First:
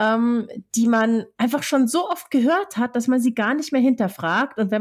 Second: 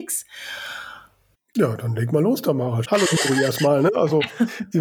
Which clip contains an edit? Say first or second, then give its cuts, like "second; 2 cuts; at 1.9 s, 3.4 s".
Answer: second; 2 cuts; at 1.3 s, 2.8 s